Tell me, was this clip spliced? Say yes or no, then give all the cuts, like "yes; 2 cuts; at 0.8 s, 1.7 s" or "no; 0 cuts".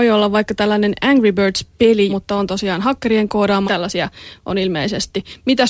yes; 2 cuts; at 2.1 s, 3.7 s